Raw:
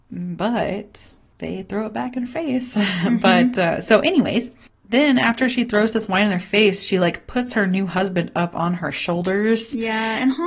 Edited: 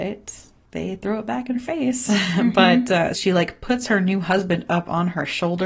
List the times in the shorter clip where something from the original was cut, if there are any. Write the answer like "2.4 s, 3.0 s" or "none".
3.1 s